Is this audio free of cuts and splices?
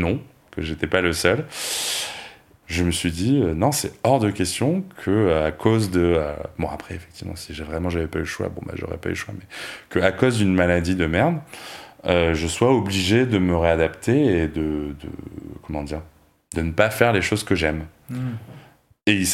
no; 1 cut; at 2.6 s

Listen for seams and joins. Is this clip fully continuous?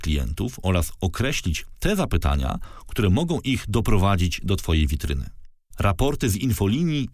no; 1 cut; at 5.7 s

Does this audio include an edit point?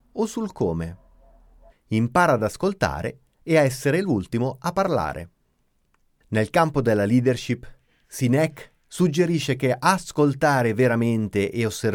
yes; 1 cut; at 1.7 s

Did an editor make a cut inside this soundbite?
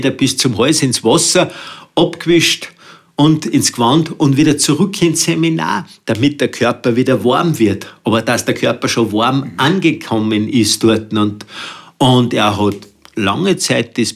no; 0 cuts

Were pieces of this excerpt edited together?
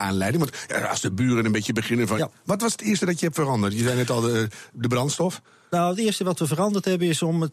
yes; 1 cut; at 2.2 s

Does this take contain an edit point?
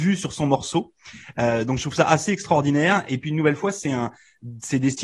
no; 0 cuts

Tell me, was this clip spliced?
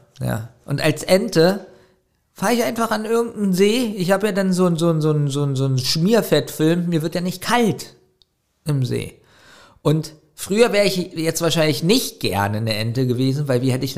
no; 0 cuts

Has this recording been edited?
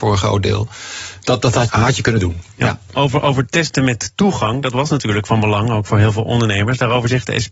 yes; 1 cut; at 1.7 s

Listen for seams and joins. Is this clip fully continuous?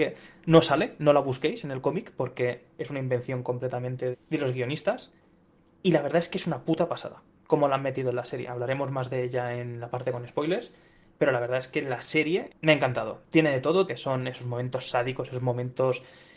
no; 3 cuts; at 4.1 s, 12.5 s, 13.9 s

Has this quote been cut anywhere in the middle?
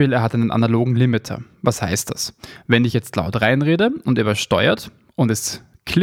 no; 0 cuts

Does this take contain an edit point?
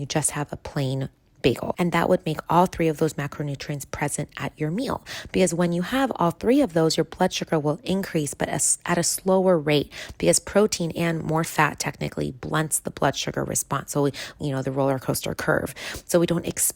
yes; 3 cuts; at 1.7 s, 11.4 s, 14.4 s

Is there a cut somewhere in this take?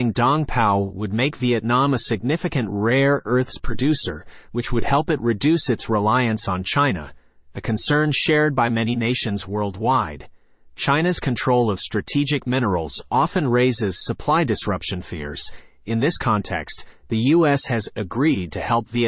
no; 0 cuts

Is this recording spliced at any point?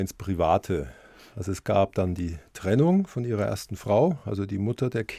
no; 0 cuts

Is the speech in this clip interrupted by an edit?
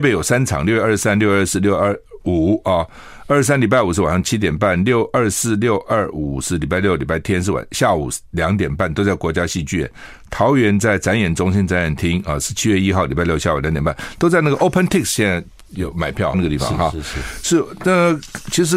yes; 1 cut; at 16.3 s

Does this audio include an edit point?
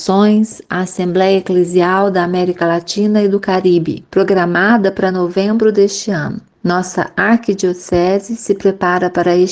no; 0 cuts

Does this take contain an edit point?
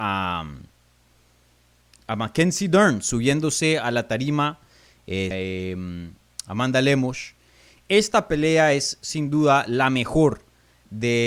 yes; 1 cut; at 5.3 s

